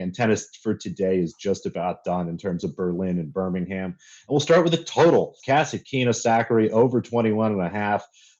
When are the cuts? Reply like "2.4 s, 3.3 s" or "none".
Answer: 5.4 s